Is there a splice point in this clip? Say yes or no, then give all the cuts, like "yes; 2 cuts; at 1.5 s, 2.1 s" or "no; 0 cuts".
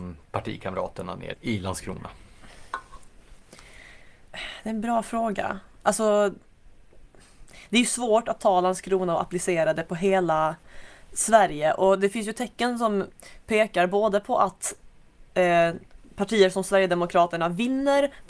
yes; 1 cut; at 1.3 s